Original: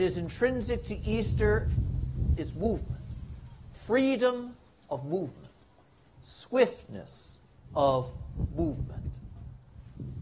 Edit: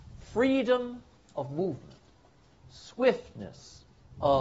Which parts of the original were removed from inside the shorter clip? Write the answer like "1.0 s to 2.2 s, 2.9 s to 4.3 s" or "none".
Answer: none